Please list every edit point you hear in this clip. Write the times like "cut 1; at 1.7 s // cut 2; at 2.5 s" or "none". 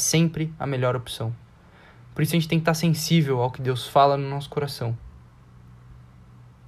none